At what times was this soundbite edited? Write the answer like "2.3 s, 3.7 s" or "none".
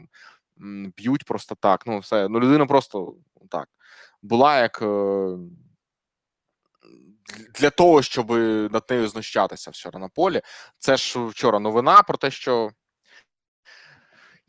none